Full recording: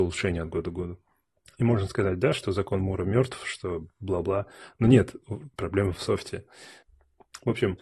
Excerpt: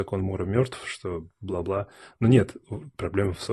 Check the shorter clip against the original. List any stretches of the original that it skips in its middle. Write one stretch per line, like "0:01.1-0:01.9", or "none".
none